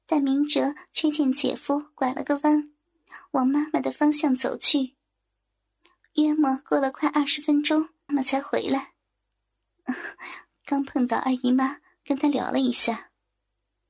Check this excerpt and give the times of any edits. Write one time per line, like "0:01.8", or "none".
0:08.1